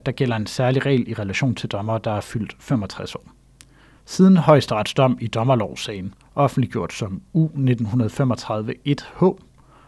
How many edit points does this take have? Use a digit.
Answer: 1